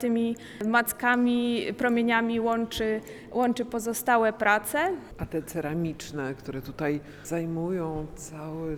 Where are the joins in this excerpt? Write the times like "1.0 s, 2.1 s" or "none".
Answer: none

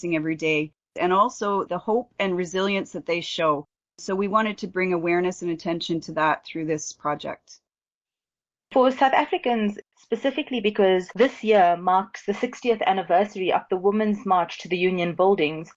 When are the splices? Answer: 9.9 s

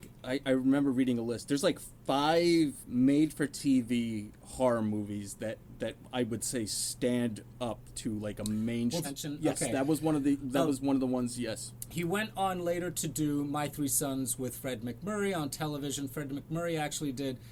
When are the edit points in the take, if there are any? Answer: 9.0 s

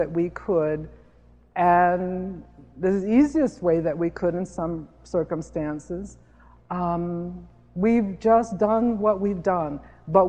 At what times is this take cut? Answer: none

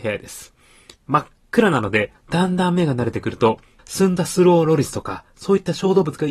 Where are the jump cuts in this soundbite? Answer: 2.1 s, 3.8 s

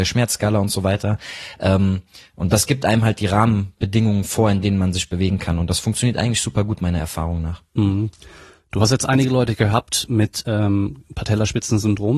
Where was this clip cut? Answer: none

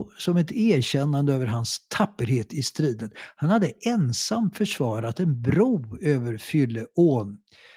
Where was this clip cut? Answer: none

